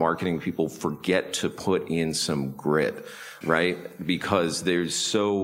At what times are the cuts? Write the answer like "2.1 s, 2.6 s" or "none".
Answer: 3.4 s